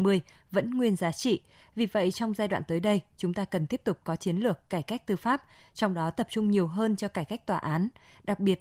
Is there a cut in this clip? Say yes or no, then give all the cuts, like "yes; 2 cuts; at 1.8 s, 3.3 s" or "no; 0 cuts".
no; 0 cuts